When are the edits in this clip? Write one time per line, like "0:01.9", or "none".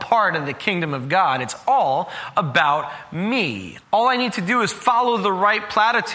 0:03.8